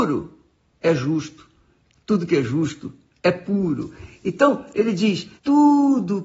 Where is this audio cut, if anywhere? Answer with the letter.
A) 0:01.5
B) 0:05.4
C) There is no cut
B